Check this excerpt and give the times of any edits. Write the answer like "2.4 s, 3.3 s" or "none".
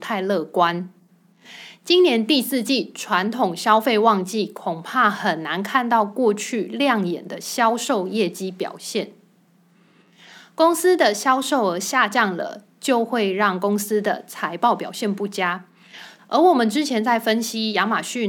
16.2 s